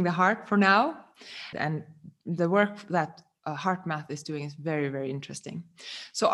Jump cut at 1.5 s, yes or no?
yes